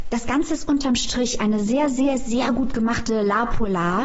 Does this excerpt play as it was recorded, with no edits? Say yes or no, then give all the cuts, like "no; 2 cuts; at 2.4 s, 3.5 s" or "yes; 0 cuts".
yes; 0 cuts